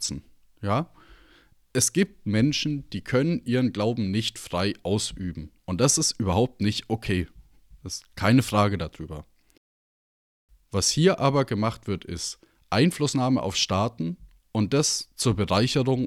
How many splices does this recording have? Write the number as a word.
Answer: zero